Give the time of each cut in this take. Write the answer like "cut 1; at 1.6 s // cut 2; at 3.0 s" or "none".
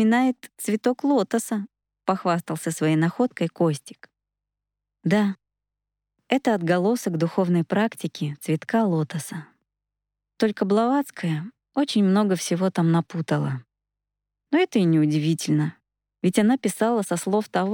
none